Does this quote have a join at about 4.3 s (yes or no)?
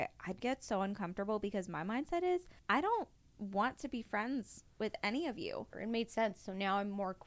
no